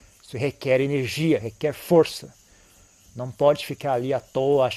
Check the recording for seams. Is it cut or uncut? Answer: cut